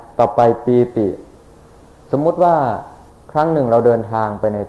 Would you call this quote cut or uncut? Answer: uncut